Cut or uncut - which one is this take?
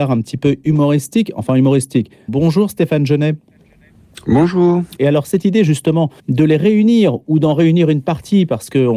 cut